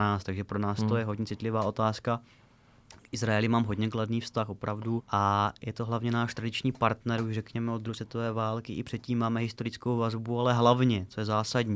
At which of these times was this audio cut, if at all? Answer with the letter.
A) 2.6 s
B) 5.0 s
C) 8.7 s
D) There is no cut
B